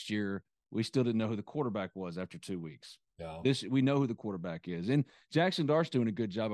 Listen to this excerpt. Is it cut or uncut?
uncut